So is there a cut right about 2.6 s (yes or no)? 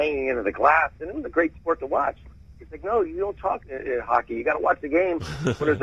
yes